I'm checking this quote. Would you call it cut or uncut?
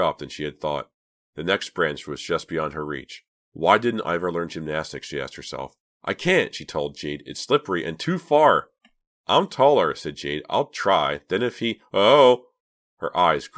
uncut